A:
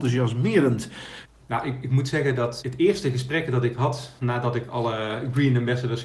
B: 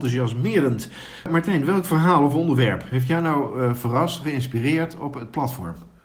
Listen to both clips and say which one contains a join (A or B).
A